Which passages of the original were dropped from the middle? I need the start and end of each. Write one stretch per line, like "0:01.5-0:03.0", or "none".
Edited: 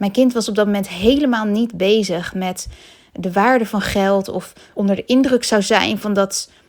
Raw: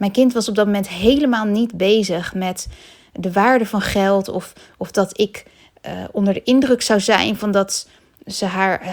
0:04.7-0:06.1